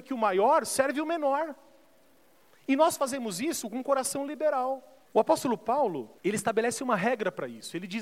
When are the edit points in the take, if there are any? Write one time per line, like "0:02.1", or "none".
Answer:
0:05.0
0:06.2